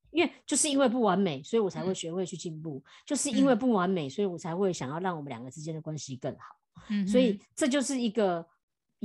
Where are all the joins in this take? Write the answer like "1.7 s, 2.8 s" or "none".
none